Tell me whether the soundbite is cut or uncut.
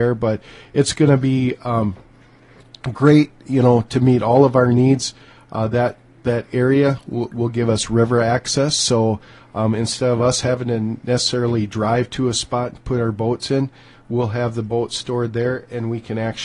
uncut